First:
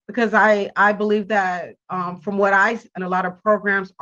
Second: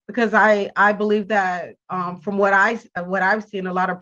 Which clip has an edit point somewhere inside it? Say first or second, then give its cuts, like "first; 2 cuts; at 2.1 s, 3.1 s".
first; 1 cut; at 3.0 s